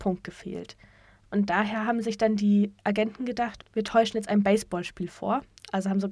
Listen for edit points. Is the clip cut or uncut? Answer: cut